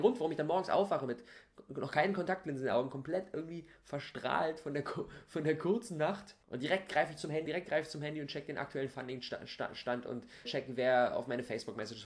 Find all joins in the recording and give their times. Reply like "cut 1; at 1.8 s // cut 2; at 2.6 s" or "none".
cut 1; at 6.4 s // cut 2; at 7.5 s // cut 3; at 10.4 s